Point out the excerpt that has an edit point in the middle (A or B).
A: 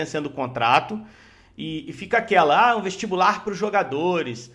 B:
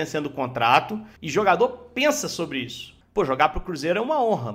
B